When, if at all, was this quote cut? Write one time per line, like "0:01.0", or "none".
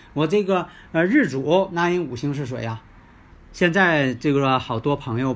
0:03.3